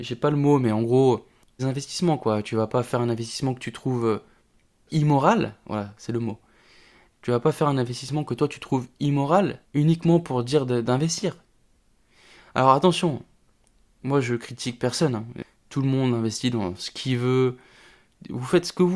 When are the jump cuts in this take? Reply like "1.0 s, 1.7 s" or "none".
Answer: 1.6 s, 9.6 s